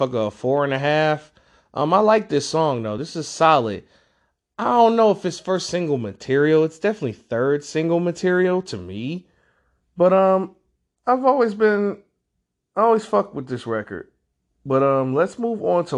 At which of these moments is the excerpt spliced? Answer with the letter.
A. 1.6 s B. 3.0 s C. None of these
C